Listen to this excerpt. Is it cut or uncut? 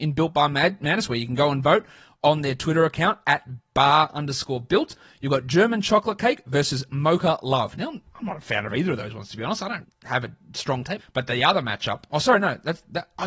cut